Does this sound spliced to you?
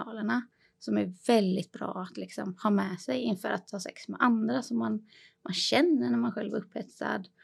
no; 0 cuts

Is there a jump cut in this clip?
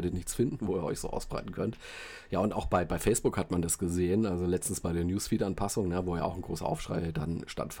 no; 0 cuts

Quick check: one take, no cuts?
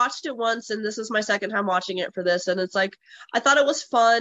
yes; 0 cuts

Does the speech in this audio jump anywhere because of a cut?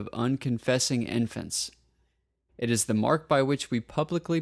yes; 1 cut; at 2.5 s

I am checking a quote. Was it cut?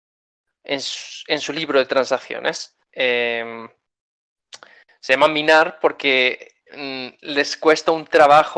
yes; 1 cut; at 2.9 s

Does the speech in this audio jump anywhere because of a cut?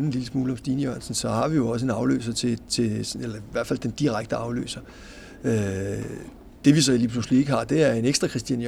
no; 0 cuts

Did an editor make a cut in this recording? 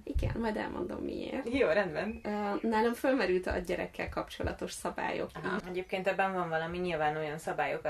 yes; 1 cut; at 5.6 s

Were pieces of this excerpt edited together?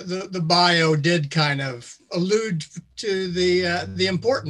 yes; 1 cut; at 2.1 s

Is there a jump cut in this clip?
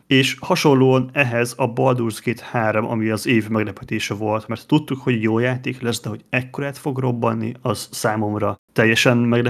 no; 0 cuts

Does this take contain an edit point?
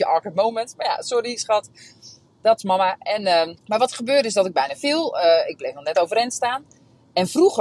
yes; 1 cut; at 3.6 s

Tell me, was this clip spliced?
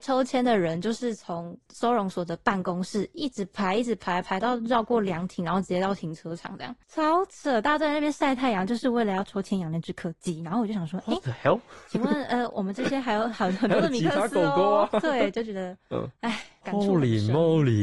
no; 0 cuts

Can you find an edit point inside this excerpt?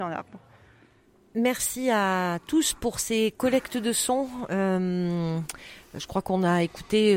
no; 0 cuts

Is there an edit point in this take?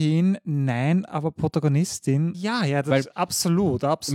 yes; 1 cut; at 2.3 s

